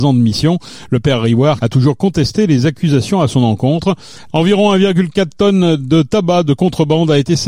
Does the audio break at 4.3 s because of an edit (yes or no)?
yes